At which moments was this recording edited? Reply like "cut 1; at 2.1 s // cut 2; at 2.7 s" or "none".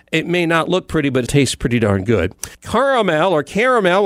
cut 1; at 1.3 s // cut 2; at 2.5 s